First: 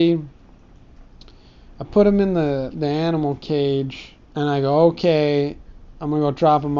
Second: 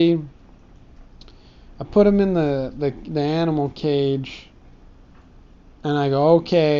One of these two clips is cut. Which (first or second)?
first